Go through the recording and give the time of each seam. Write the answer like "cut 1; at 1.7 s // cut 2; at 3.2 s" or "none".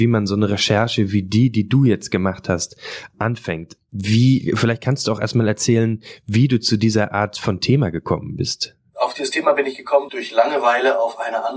none